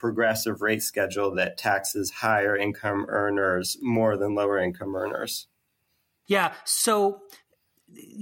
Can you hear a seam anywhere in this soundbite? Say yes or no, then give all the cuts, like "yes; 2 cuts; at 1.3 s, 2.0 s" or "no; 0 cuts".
yes; 1 cut; at 6.3 s